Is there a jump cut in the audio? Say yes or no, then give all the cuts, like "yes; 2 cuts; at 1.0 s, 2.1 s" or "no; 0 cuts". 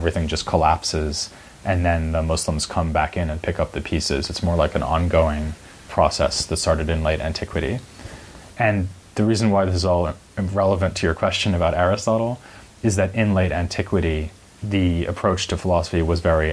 no; 0 cuts